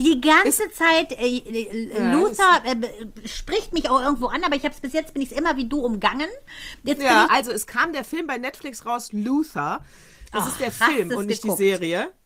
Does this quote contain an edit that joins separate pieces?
yes; 1 cut; at 7.3 s

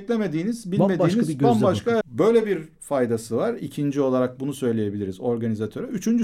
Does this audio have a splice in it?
yes; 1 cut; at 2.0 s

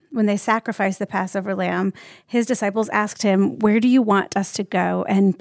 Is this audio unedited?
yes; 0 cuts

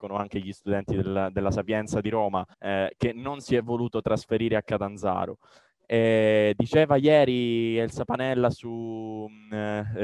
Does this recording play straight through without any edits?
no; 1 cut; at 2.5 s

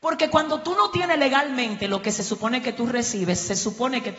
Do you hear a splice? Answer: no; 0 cuts

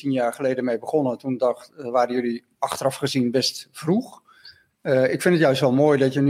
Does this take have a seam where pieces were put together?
no; 0 cuts

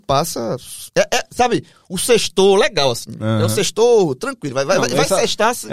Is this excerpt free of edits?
yes; 0 cuts

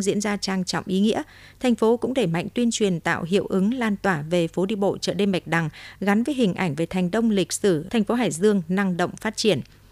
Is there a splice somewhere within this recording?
yes; 1 cut; at 7.9 s

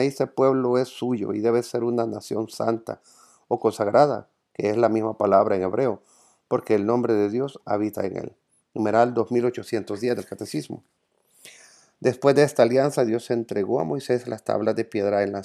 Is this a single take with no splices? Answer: yes; 0 cuts

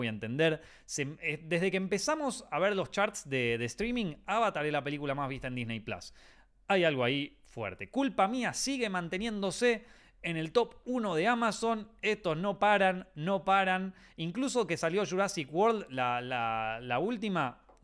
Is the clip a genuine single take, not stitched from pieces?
yes; 0 cuts

